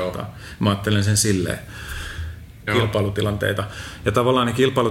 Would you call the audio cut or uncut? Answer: cut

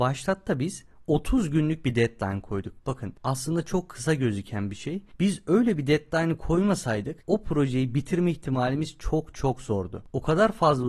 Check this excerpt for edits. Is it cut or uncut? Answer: cut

